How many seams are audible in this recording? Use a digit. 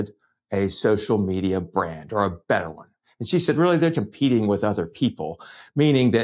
1